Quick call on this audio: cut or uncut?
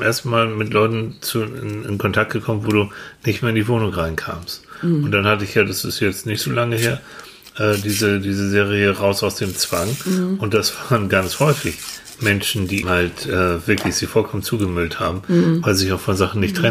cut